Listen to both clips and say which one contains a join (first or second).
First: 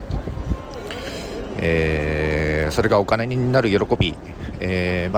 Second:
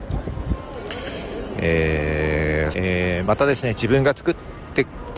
second